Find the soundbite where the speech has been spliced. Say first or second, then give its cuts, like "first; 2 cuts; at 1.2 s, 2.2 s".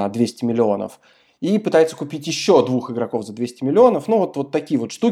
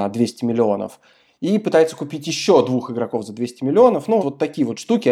second; 1 cut; at 4.2 s